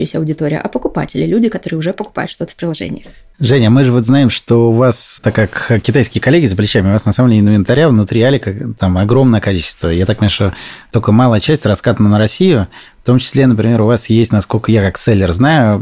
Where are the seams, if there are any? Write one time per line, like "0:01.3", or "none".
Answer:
none